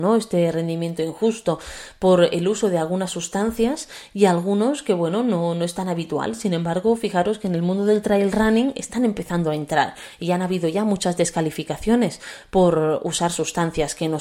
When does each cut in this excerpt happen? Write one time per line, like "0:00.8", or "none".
none